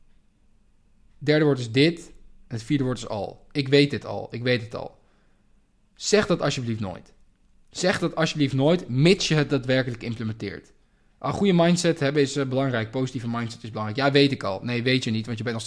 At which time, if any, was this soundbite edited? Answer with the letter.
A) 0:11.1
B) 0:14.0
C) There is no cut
C